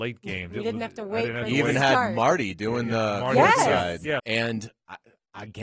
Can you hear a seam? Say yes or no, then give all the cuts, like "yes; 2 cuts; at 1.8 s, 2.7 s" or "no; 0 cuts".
yes; 1 cut; at 4.2 s